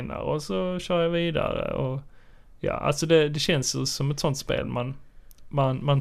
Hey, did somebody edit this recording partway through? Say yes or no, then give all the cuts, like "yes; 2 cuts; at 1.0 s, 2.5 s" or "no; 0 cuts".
no; 0 cuts